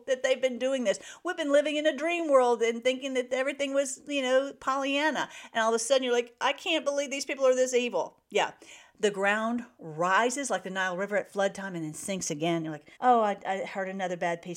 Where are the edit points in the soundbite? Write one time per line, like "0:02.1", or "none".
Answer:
0:13.0

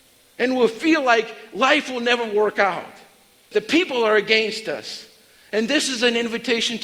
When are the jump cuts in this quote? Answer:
0:03.5

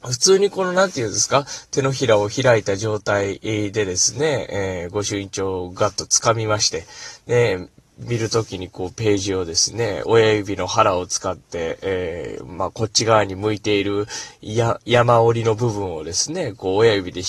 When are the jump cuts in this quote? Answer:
none

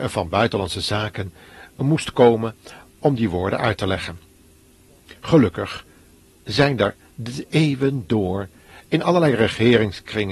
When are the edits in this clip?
none

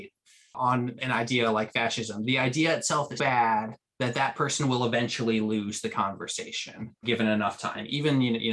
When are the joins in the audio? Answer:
0:03.2
0:07.0

